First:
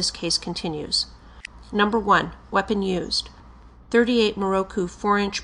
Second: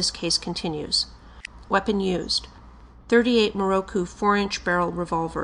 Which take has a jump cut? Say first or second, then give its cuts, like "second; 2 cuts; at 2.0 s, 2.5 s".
second; 1 cut; at 1.6 s